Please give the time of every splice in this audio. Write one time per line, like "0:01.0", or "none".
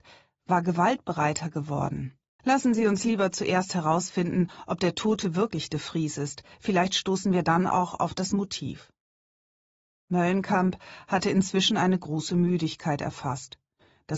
0:02.4